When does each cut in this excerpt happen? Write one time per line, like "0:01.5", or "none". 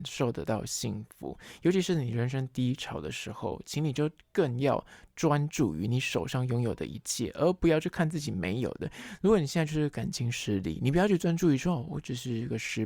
none